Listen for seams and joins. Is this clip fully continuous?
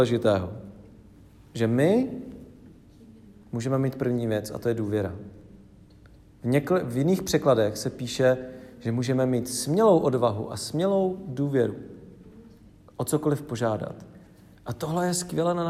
yes; 0 cuts

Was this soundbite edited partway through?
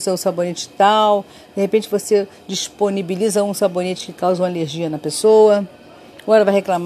no; 0 cuts

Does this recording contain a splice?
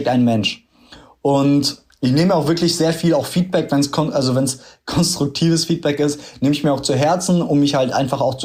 no; 0 cuts

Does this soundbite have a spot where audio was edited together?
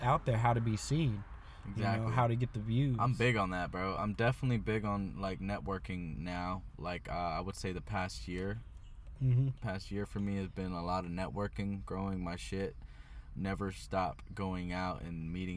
no; 0 cuts

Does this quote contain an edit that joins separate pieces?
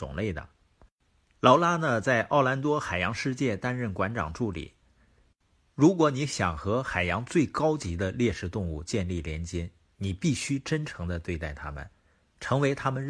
yes; 1 cut; at 4.8 s

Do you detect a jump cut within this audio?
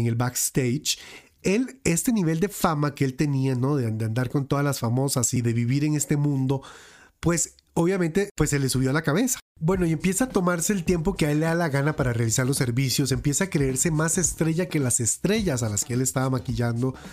no; 0 cuts

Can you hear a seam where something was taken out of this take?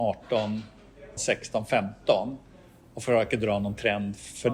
yes; 1 cut; at 1.2 s

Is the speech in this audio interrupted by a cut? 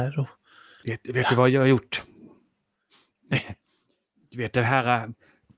no; 0 cuts

